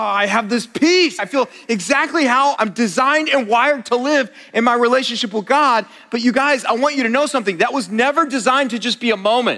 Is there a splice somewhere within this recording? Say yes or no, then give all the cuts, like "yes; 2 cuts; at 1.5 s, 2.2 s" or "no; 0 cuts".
yes; 2 cuts; at 1.2 s, 2.6 s